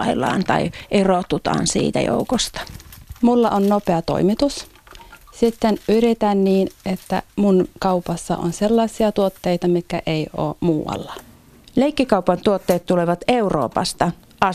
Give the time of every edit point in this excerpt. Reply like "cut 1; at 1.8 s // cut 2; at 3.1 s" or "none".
none

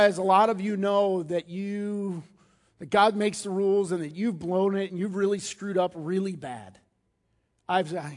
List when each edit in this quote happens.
none

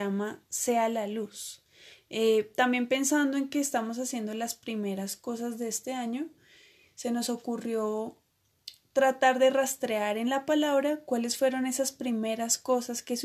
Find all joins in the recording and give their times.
none

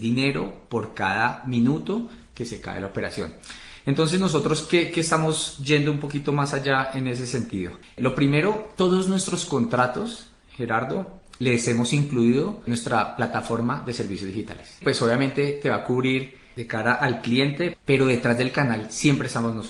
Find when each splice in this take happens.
cut 1; at 14.8 s // cut 2; at 17.7 s

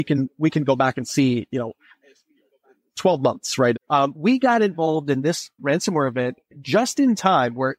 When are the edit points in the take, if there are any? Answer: cut 1; at 3.7 s // cut 2; at 5.6 s

